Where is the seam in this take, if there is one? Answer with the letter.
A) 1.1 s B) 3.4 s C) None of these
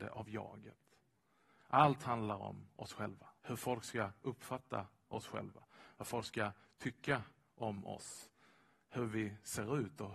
B